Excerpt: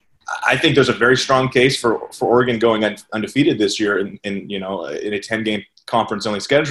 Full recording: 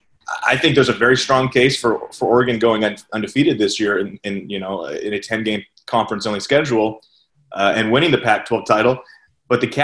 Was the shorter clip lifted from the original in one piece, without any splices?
yes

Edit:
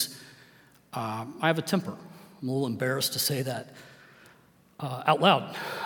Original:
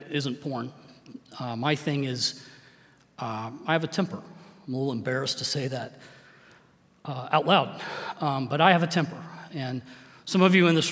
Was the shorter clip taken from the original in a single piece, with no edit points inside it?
yes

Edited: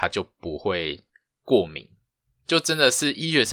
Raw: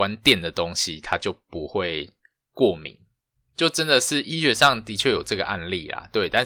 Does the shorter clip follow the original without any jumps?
yes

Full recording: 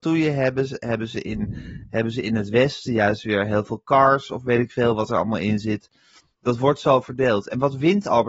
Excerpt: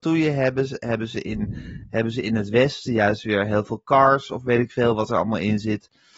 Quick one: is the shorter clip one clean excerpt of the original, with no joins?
yes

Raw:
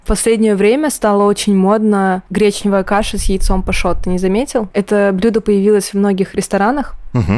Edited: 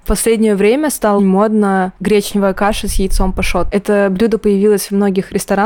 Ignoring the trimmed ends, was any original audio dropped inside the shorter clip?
yes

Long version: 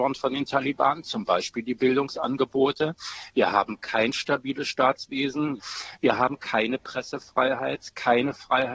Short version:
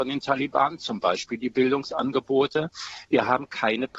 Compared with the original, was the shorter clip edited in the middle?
yes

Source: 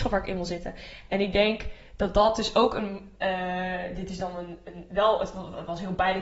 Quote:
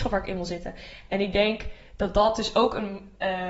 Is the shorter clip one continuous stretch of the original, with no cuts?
yes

